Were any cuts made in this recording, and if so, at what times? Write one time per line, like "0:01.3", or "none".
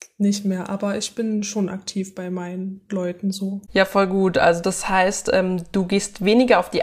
none